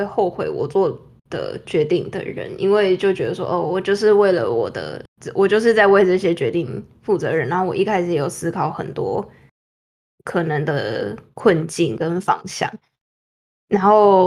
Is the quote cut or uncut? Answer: uncut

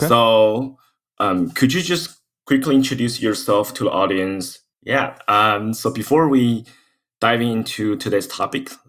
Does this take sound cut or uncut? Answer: cut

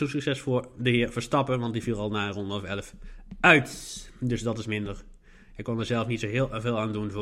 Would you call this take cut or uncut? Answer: uncut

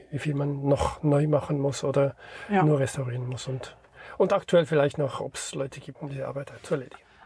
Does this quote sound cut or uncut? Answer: cut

